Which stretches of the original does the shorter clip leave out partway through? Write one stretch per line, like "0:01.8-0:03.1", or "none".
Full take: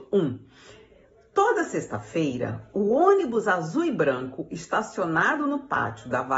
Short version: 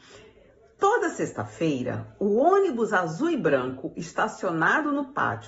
none